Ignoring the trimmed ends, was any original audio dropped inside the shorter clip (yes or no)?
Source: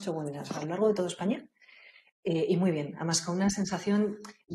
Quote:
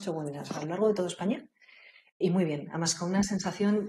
yes